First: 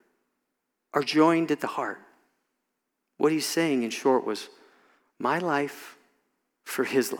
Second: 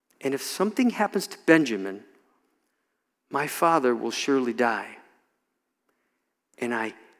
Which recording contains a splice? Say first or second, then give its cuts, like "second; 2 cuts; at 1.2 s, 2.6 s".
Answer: first; 1 cut; at 3.0 s